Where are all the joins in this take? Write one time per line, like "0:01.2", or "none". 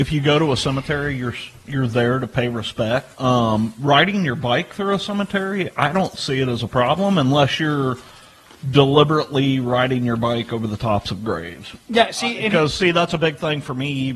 0:03.1